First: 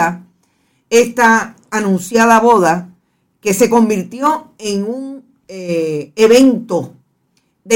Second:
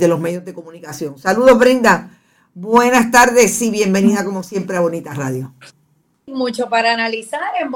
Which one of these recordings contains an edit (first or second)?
second